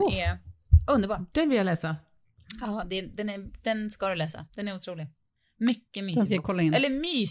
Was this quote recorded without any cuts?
yes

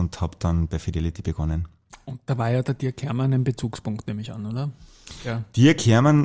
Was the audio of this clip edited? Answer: no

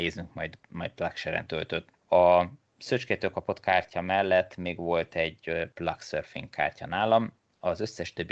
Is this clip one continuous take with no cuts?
no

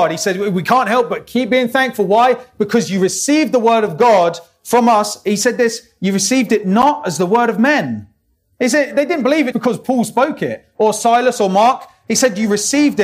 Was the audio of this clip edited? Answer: yes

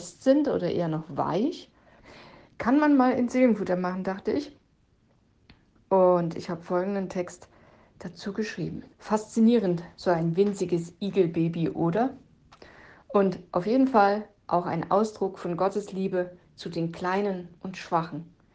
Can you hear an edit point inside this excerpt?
yes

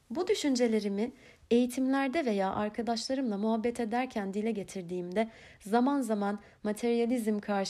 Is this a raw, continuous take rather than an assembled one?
yes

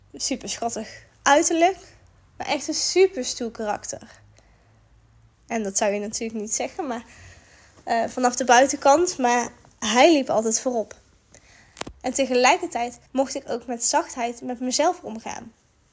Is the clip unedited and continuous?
no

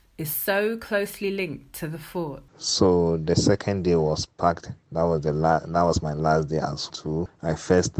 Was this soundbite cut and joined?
yes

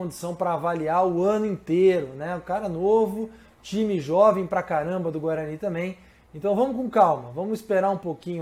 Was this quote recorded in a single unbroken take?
yes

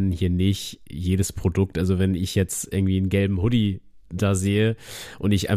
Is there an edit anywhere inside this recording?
no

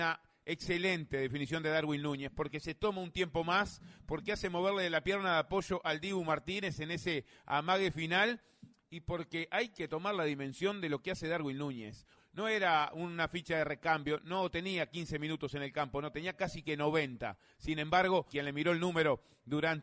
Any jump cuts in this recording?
yes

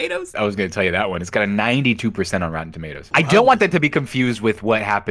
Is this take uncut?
yes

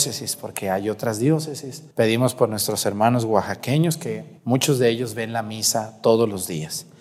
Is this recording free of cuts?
no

